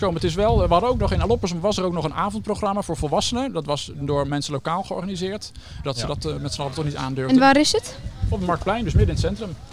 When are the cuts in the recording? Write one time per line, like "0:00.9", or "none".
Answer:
0:04.3
0:05.8

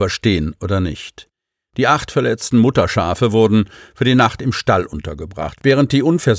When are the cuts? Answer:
none

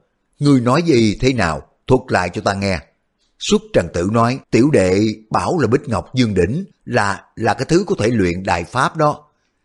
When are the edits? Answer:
0:04.4
0:06.7

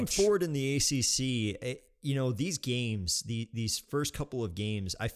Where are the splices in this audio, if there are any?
none

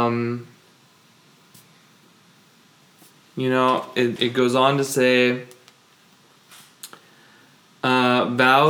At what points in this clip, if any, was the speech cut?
0:04.2

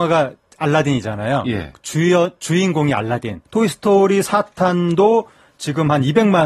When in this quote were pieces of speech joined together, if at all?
0:03.5

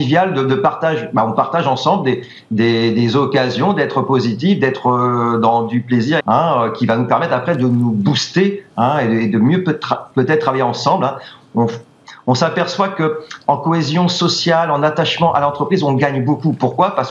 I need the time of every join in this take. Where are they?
0:06.2

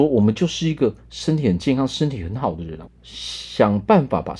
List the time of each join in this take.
0:02.9

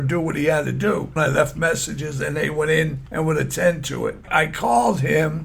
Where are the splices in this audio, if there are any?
0:01.2
0:04.2

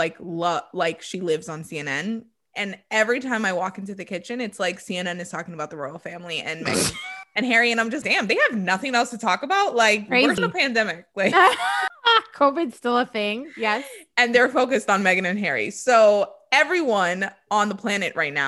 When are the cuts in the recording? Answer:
0:08.0
0:10.4
0:11.9

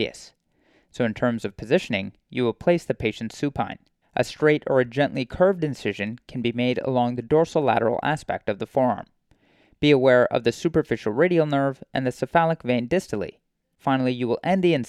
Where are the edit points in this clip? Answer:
0:04.0

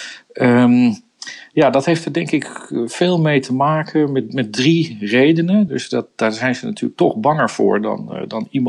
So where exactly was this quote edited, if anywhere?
0:05.7

